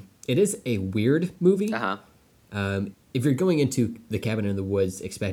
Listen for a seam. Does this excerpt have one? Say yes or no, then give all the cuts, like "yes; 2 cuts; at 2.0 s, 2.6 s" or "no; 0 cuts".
yes; 1 cut; at 2.9 s